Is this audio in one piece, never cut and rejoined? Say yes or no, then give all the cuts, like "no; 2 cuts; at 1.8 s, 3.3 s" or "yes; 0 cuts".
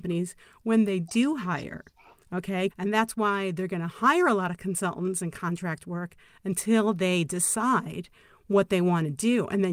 no; 1 cut; at 2.7 s